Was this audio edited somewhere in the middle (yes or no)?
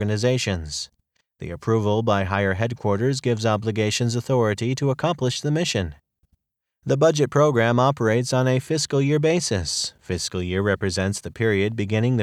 no